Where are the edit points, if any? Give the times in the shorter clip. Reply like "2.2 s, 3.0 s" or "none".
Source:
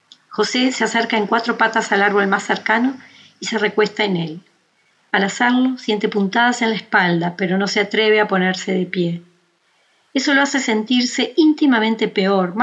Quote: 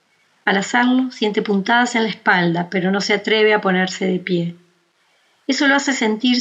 none